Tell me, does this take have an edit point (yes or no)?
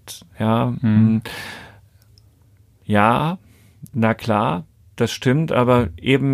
yes